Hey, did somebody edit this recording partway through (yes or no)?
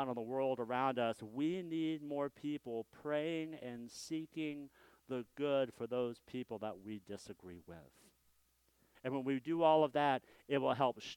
yes